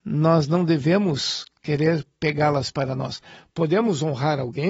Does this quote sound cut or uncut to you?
uncut